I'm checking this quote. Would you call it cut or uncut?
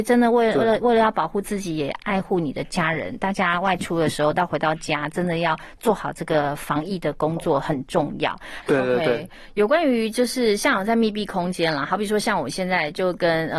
cut